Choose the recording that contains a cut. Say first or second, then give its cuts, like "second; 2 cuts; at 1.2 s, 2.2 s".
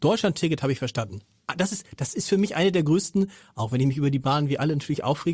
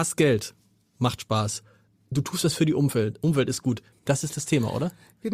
second; 1 cut; at 3.9 s